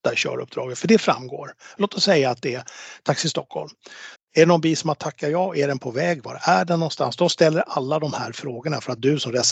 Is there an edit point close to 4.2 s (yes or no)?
yes